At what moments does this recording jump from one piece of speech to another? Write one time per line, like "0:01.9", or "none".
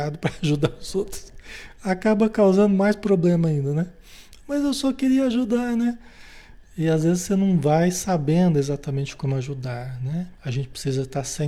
0:10.3